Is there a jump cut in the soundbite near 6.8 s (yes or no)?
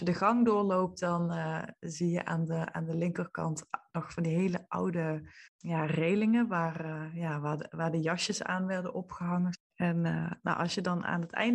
no